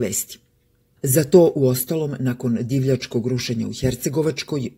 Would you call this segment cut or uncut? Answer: cut